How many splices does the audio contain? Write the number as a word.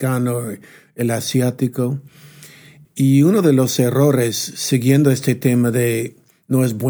one